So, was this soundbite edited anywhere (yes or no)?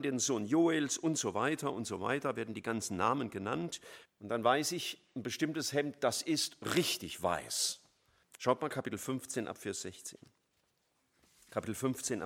yes